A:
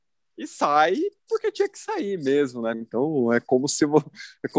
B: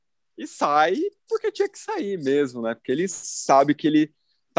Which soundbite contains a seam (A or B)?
A